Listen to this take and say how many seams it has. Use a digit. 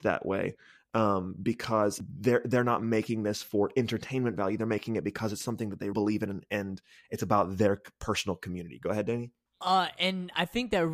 1